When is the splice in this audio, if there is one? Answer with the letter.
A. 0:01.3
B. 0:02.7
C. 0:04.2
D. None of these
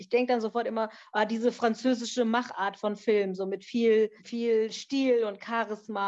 C